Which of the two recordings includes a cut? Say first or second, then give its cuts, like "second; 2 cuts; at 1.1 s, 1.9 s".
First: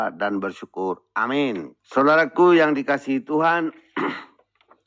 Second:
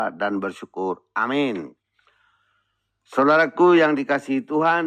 first; 1 cut; at 1.8 s